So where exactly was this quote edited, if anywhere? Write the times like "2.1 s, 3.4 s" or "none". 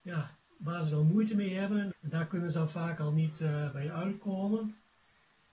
1.9 s